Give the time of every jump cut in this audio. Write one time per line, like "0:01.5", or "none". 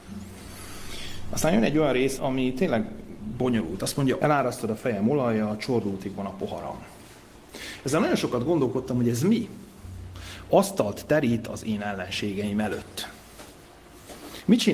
0:02.2
0:04.2